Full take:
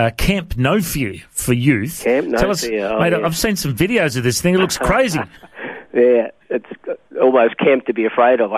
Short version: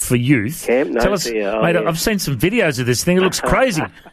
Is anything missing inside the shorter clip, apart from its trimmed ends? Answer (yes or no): no